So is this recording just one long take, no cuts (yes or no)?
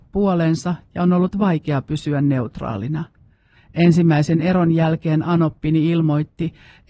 no